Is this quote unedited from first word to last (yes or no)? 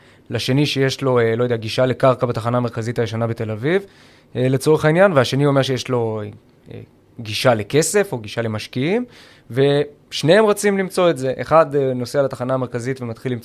yes